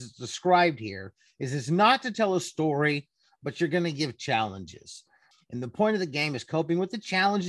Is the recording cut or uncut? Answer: cut